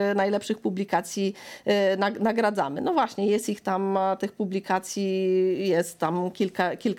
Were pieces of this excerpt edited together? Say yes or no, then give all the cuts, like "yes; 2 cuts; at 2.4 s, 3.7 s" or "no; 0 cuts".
no; 0 cuts